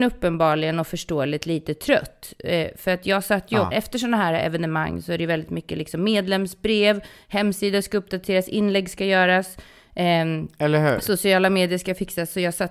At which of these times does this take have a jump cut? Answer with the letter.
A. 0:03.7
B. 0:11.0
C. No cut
A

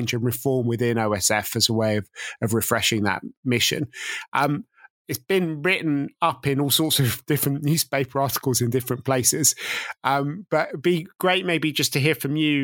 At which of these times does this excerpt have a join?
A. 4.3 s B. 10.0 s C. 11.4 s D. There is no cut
D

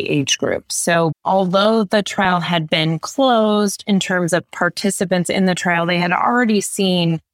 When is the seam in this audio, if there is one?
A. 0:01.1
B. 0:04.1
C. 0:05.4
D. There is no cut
A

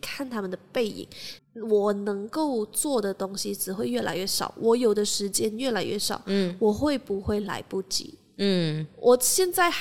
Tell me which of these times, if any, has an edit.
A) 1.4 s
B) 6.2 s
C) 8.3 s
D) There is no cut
A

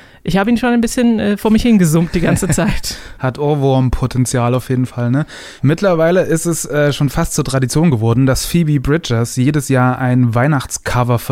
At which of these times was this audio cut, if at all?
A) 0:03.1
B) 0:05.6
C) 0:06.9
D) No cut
B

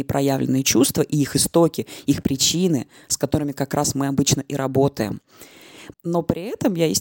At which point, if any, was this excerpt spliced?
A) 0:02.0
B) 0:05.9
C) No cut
B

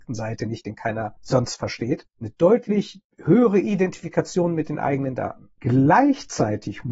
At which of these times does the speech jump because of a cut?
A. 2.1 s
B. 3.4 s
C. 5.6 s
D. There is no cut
A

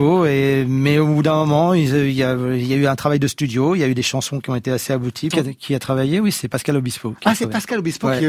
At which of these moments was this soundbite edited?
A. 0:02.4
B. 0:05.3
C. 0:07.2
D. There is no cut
B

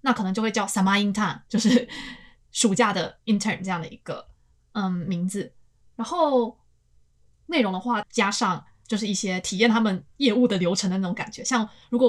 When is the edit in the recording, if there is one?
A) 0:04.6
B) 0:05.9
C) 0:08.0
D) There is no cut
C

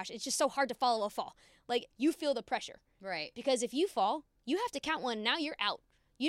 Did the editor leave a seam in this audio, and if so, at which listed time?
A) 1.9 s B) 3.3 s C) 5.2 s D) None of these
A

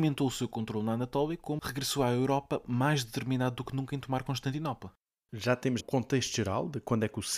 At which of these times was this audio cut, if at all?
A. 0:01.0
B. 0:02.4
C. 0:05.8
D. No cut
C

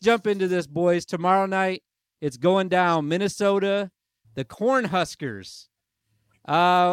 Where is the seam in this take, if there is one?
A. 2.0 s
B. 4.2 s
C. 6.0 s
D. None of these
B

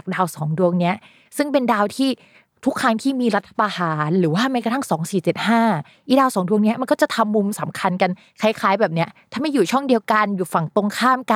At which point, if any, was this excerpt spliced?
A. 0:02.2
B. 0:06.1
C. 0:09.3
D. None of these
D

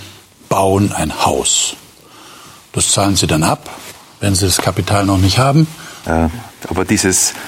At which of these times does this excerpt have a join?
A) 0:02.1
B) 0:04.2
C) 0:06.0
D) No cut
C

